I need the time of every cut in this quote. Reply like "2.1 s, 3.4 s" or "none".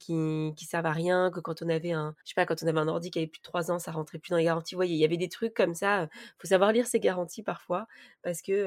2.2 s